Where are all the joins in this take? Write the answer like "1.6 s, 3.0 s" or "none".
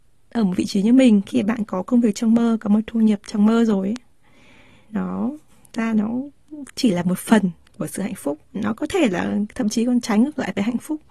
4.9 s